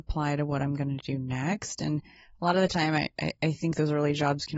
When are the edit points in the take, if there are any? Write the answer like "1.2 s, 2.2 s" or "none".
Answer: none